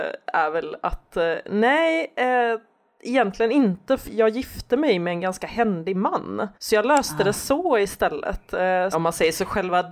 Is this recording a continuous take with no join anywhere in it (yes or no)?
no